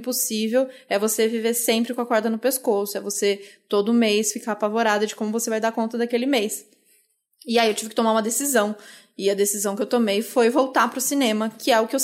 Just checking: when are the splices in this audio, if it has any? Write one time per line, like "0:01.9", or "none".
none

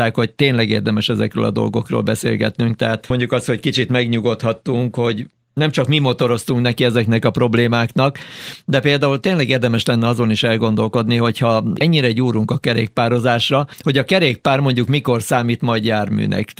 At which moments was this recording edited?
none

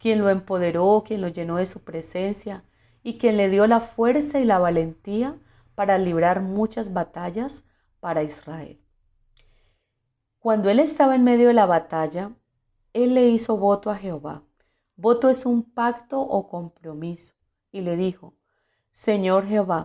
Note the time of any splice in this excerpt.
none

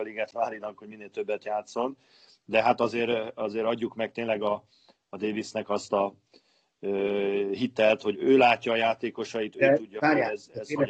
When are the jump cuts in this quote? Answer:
0:08.1

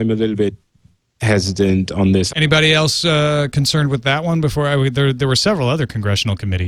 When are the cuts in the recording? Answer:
0:02.3

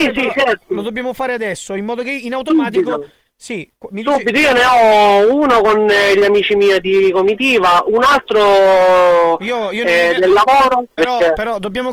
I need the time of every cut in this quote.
0:11.0

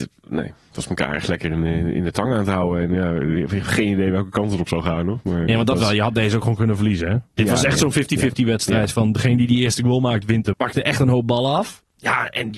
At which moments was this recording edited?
0:07.3
0:10.5

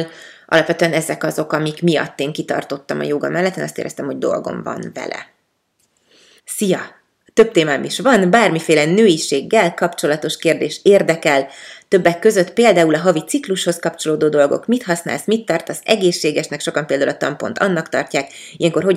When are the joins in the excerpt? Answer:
0:06.4

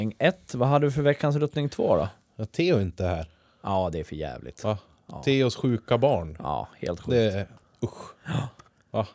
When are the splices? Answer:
none

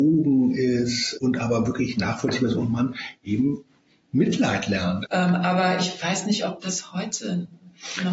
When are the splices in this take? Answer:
0:01.2
0:05.1

